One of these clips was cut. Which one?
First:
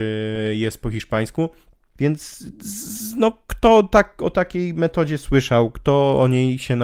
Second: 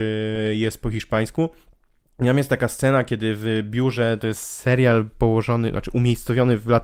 first; 1 cut; at 2.0 s

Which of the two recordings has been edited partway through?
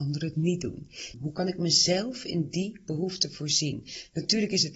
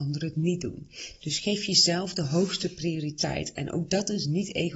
first; 1 cut; at 1.1 s

